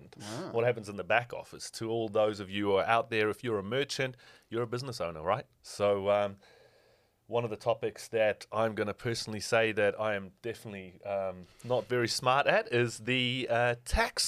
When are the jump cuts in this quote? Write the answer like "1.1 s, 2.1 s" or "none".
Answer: none